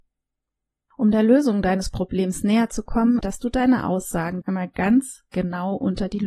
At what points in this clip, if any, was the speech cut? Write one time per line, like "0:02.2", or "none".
0:03.2
0:04.4